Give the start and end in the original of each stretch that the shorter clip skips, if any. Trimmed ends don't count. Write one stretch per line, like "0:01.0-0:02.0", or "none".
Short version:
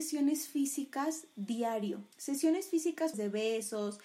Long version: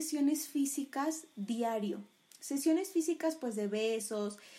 0:02.1-0:02.4
0:03.4-0:03.5